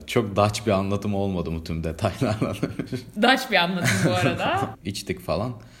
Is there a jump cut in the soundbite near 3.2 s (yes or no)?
yes